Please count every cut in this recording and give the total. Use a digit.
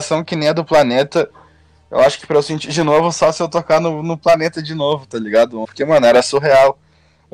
1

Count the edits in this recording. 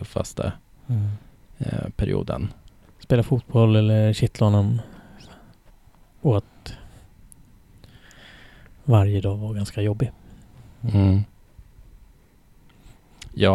1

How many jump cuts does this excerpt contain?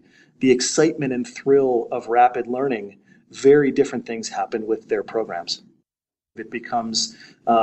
1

